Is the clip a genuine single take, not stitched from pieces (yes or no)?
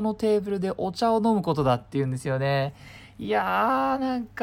yes